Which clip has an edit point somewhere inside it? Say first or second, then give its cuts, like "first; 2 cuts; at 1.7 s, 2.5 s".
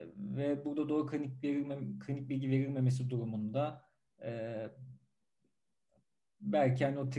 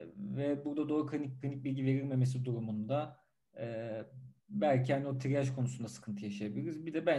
second; 2 cuts; at 1.4 s, 4.4 s